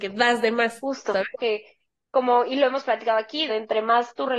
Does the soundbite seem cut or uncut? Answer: cut